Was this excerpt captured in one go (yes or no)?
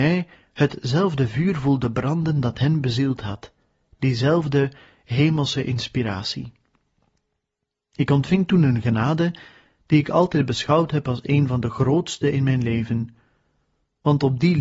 yes